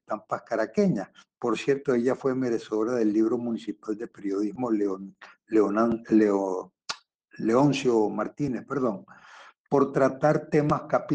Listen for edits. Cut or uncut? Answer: uncut